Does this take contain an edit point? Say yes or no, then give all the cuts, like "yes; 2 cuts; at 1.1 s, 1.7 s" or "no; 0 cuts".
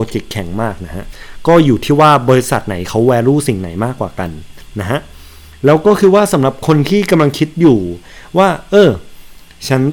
no; 0 cuts